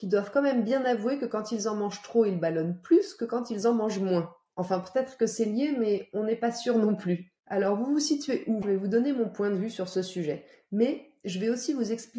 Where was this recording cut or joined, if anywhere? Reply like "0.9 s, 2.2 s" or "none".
7.4 s, 8.6 s